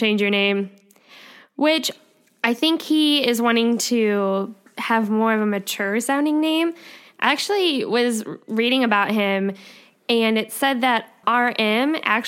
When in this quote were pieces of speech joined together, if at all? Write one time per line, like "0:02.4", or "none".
0:11.2

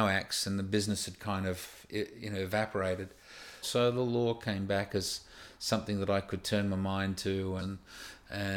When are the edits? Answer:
0:03.6
0:07.6

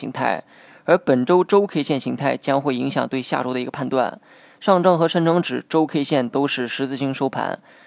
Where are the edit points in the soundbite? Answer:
none

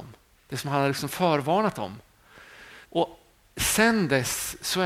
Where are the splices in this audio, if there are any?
0:02.8

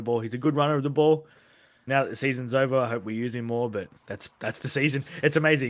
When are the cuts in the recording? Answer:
0:01.9
0:04.0

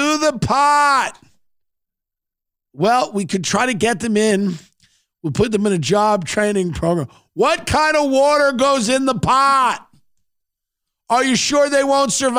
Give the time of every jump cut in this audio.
none

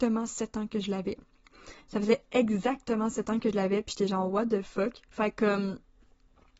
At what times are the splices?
0:01.8
0:05.1

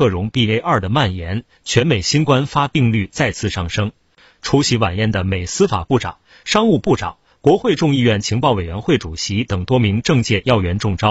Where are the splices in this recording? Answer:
0:04.3

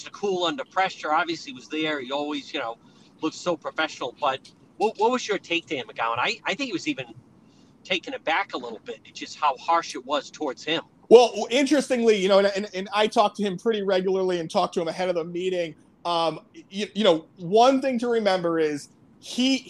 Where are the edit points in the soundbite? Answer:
none

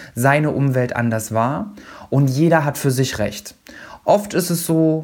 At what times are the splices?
0:04.0

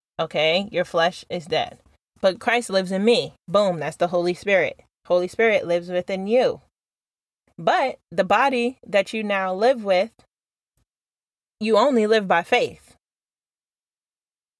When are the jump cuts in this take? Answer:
none

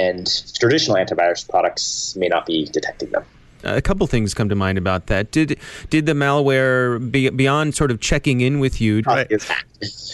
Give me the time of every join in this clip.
0:03.6
0:09.0

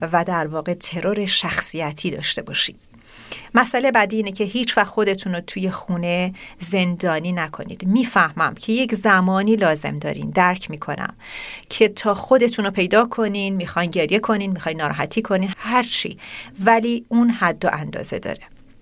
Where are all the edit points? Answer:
0:15.5

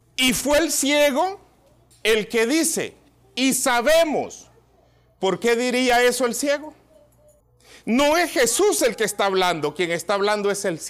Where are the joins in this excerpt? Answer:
none

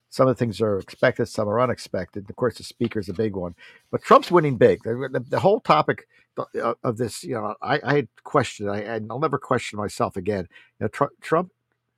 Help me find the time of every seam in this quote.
none

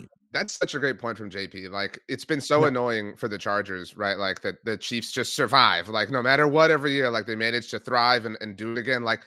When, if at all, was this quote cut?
none

